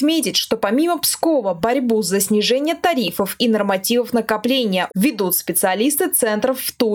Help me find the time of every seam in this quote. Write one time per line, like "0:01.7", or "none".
0:04.9